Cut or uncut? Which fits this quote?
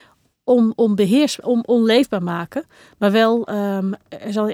cut